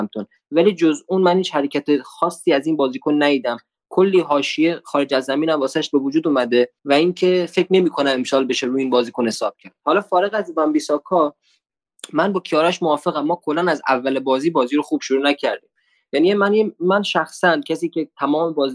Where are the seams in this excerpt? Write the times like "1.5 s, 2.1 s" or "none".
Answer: 6.8 s